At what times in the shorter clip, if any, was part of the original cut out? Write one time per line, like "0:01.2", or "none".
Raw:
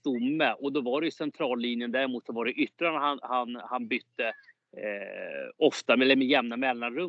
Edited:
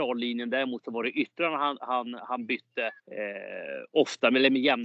0:03.0